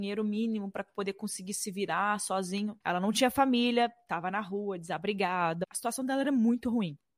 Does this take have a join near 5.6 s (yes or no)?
yes